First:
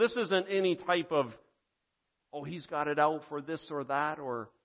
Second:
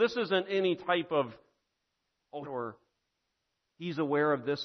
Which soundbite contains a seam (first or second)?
second